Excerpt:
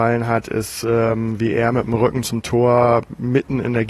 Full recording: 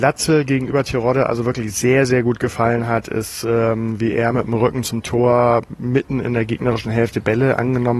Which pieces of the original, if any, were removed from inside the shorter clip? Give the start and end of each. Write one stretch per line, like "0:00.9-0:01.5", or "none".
none